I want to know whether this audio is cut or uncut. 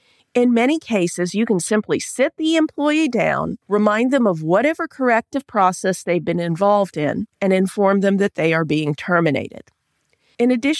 cut